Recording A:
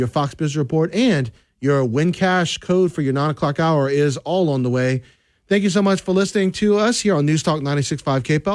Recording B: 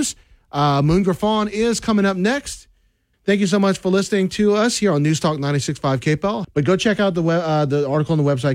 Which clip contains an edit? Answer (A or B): B